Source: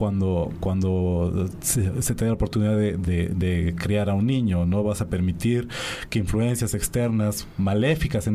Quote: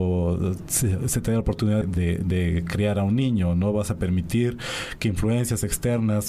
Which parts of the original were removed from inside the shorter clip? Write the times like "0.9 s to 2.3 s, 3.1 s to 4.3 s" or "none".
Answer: 2.8 s to 2.9 s